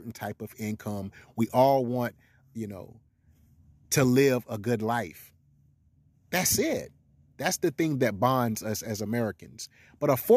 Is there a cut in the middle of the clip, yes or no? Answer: no